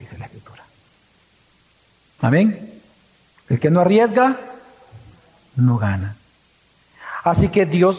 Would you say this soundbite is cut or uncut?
cut